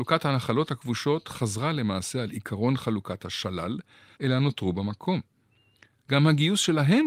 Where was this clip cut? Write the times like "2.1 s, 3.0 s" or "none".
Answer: 4.2 s, 6.0 s